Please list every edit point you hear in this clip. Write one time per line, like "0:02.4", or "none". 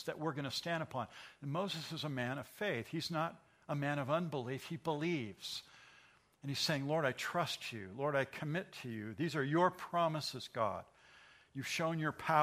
none